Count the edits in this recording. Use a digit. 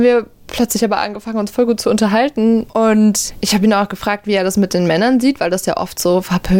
1